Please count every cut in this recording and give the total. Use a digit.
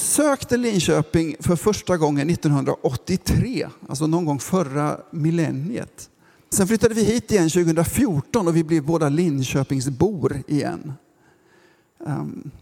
1